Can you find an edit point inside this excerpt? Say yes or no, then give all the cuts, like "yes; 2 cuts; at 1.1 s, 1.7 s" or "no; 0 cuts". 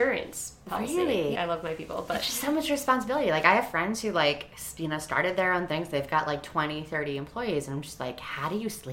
yes; 1 cut; at 1.4 s